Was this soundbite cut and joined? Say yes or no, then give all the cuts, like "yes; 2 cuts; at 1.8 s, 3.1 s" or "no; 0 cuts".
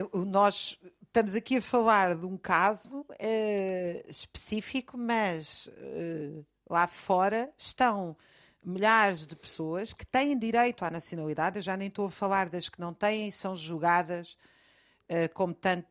no; 0 cuts